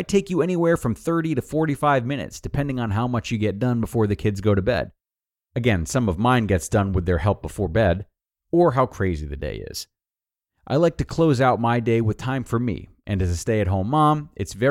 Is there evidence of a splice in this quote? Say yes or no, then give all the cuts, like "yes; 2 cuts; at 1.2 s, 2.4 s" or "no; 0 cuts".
no; 0 cuts